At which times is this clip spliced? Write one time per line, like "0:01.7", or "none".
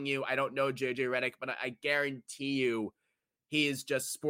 none